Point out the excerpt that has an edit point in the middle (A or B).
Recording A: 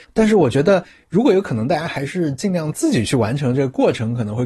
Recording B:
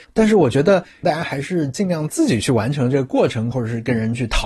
B